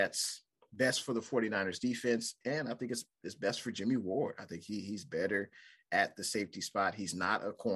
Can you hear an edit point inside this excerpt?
no; 0 cuts

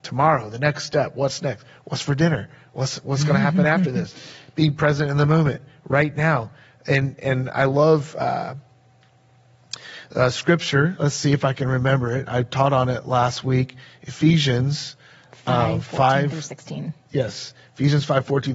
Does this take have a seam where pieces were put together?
no; 0 cuts

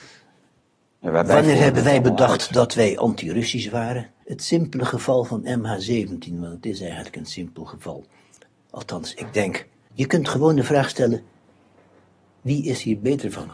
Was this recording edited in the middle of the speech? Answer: yes; 1 cut; at 4.2 s

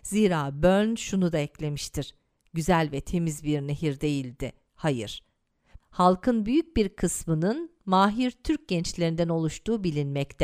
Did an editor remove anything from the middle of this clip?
yes; 1 cut; at 5.8 s

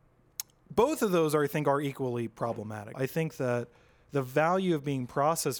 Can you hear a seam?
yes; 1 cut; at 2.9 s

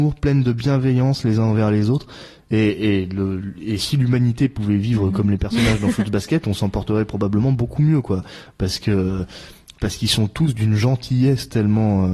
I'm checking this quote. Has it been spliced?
no; 0 cuts

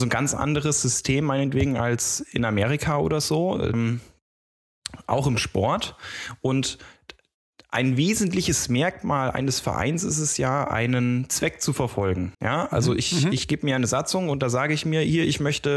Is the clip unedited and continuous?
no; 2 cuts; at 3.7 s, 12.3 s

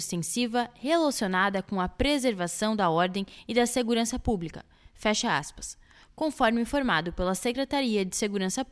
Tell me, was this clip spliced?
no; 0 cuts

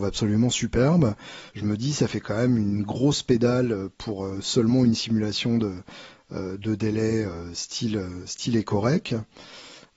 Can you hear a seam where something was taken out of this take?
yes; 1 cut; at 1.5 s

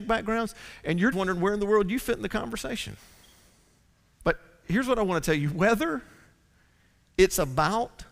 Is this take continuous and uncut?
no; 2 cuts; at 1.1 s, 4.1 s

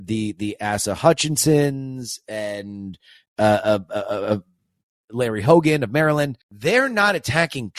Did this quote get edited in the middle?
yes; 1 cut; at 6.4 s

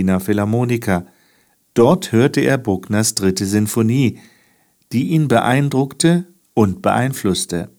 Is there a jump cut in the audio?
no; 0 cuts

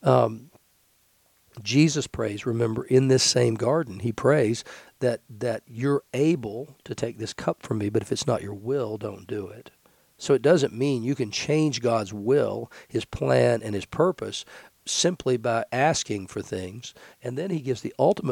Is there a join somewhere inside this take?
yes; 1 cut; at 17.1 s

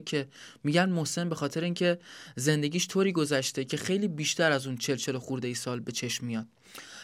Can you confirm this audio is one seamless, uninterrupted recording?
yes; 0 cuts

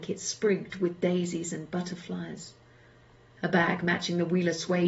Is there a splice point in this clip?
no; 0 cuts

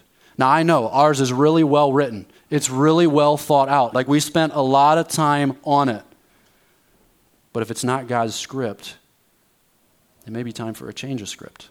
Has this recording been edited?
yes; 1 cut; at 3.9 s

